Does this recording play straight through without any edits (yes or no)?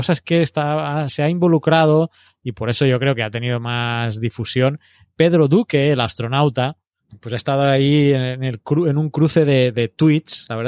yes